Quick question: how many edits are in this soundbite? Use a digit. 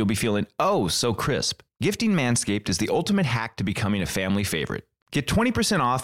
0